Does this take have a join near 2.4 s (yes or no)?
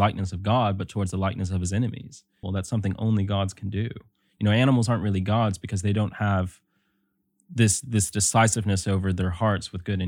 yes